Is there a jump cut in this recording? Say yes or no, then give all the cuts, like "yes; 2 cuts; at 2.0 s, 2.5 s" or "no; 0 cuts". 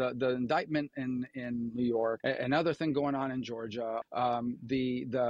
yes; 2 cuts; at 2.2 s, 4.0 s